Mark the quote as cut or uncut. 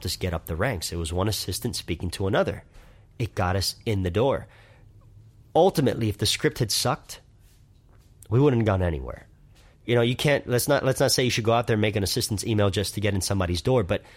uncut